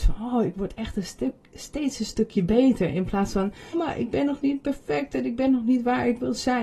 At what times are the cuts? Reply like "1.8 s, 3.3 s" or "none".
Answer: 3.7 s